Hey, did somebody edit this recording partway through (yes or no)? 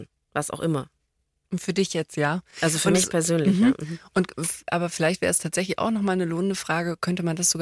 no